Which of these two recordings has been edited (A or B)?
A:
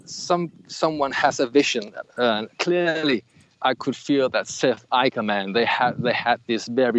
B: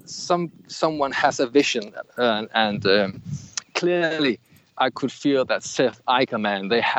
A